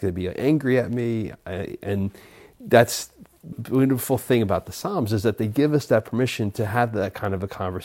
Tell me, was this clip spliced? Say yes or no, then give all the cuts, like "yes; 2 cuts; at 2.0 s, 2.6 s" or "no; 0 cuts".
yes; 1 cut; at 3.5 s